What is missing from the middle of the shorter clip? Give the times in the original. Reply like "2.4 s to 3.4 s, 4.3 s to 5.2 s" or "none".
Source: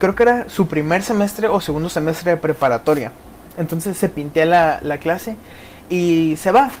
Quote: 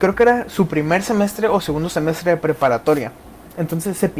none